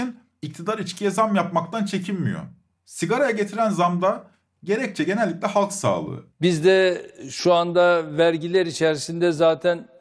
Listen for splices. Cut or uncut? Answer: cut